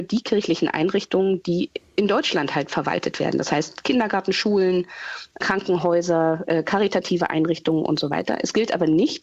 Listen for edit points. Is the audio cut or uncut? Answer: uncut